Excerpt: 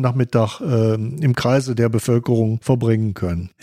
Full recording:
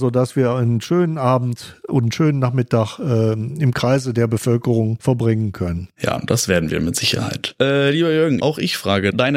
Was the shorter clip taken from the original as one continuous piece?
yes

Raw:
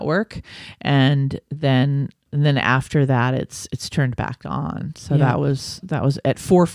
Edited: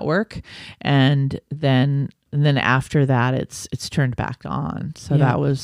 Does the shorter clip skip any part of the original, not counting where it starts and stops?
no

